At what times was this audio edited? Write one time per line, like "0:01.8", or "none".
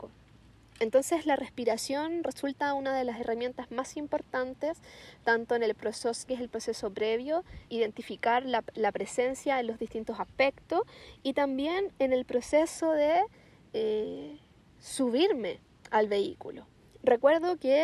0:06.3
0:07.7